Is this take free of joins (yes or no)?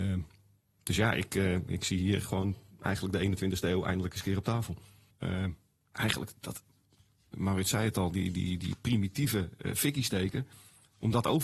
no